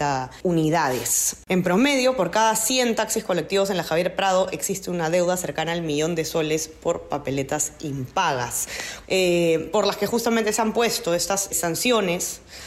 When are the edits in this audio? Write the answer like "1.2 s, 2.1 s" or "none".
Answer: 9.0 s, 11.5 s

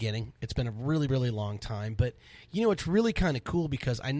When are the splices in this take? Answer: none

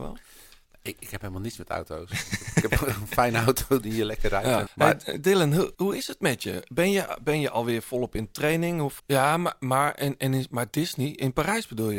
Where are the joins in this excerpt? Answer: 4.7 s, 5.7 s, 9.0 s

